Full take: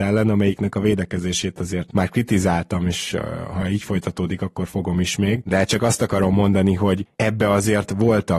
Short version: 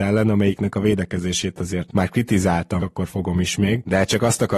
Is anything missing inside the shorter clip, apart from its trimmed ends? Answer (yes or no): yes